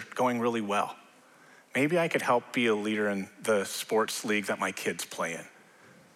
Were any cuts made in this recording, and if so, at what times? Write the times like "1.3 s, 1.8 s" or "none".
none